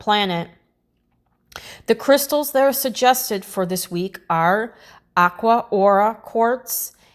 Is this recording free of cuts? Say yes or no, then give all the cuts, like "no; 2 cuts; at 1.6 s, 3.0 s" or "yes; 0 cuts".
yes; 0 cuts